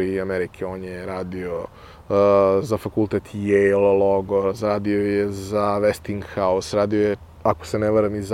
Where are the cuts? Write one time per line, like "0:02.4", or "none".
none